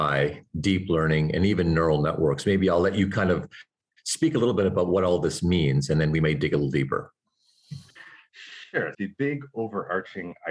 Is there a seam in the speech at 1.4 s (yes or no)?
no